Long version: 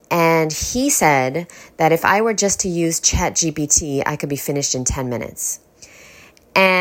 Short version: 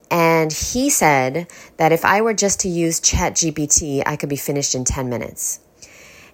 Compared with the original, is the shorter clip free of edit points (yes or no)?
yes